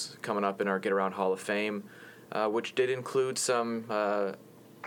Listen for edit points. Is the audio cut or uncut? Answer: cut